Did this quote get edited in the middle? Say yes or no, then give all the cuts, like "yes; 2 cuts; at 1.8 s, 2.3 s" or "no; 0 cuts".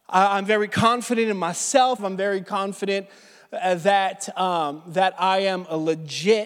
yes; 1 cut; at 2.0 s